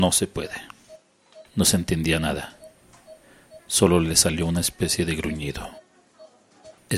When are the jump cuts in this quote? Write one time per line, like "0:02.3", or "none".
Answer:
0:01.5
0:03.6